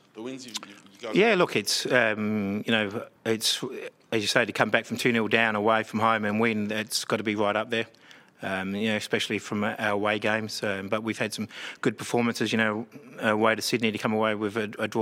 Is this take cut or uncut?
cut